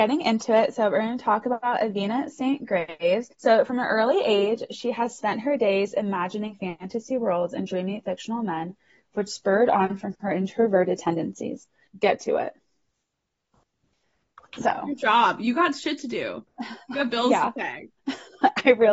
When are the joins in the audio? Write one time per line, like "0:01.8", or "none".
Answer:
0:03.3
0:11.9

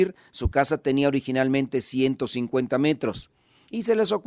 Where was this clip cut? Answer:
none

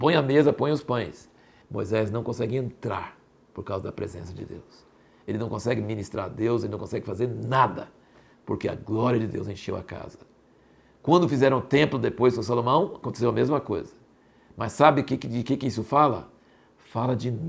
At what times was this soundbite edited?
0:01.6

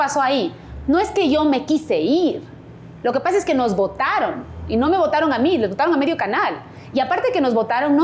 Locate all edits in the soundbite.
none

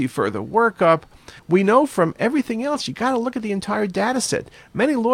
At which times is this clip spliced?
0:01.4

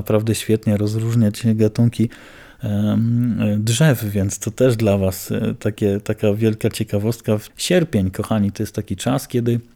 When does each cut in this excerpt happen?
0:07.5

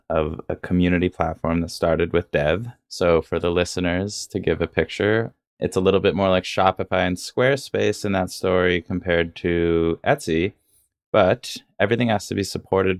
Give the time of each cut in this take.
none

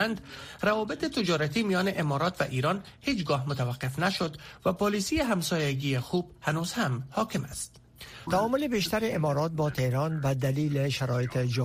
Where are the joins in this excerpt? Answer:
0:08.3

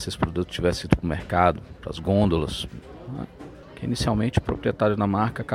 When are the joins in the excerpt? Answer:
0:03.6

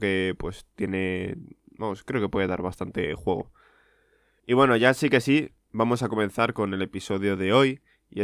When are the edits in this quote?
none

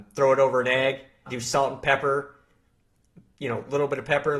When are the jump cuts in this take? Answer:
0:01.3

